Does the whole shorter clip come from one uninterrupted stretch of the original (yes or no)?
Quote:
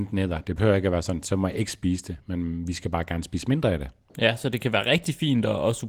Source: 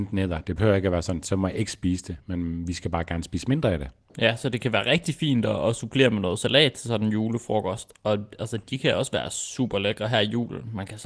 yes